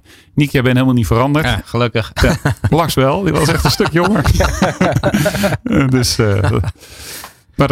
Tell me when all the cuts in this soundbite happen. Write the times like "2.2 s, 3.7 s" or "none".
none